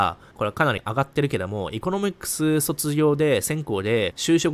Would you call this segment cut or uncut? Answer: uncut